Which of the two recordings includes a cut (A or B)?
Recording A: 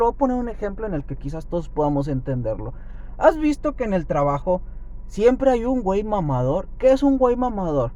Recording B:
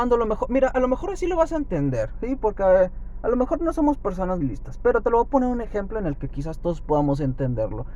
B